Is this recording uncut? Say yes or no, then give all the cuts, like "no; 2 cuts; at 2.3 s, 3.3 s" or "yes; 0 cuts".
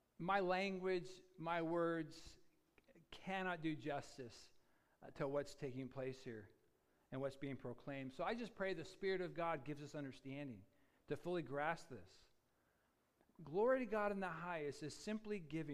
yes; 0 cuts